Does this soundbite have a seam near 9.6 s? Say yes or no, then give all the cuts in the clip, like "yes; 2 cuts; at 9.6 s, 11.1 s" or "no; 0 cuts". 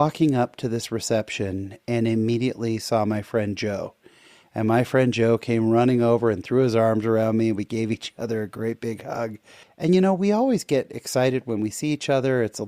yes; 1 cut; at 9.6 s